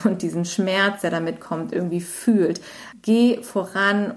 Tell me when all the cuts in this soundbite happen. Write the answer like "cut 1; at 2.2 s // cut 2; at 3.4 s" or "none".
cut 1; at 2.9 s